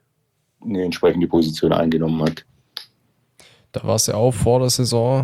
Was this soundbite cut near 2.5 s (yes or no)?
yes